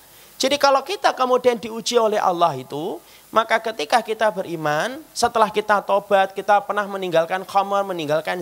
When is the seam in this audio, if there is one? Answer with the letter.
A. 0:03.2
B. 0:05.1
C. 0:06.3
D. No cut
D